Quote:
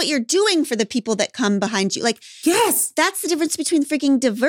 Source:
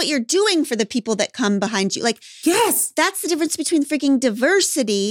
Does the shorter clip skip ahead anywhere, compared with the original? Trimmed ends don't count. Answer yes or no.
no